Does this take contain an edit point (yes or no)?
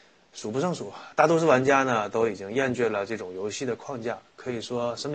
no